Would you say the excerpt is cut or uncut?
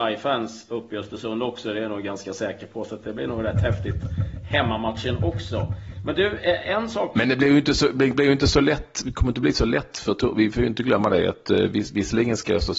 uncut